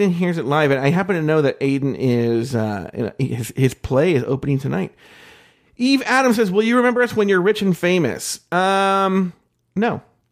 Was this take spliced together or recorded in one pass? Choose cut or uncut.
uncut